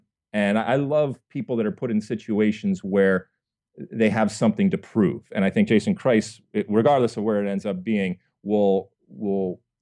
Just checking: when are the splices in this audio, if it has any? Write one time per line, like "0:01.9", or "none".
none